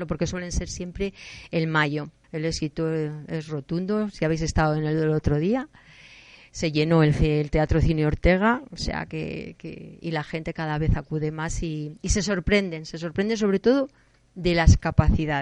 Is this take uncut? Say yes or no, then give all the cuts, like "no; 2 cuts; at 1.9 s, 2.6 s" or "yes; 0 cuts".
no; 1 cut; at 2.2 s